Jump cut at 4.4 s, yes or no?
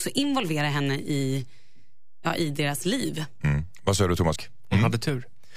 yes